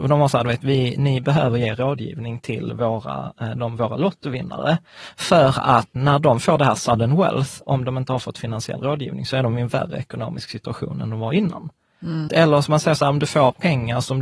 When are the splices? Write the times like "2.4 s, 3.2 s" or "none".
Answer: 6.0 s, 7.6 s, 12.3 s